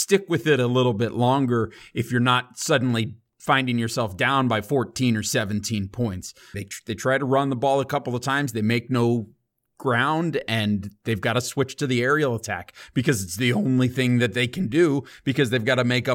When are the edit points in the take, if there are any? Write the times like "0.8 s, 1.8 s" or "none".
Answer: 6.5 s